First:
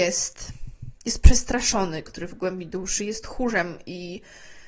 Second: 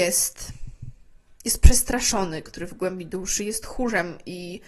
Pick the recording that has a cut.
first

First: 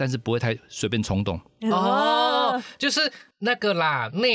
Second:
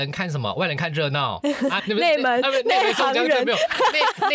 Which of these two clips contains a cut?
second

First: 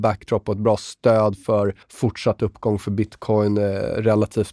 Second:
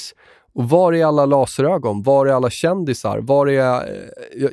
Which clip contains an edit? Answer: first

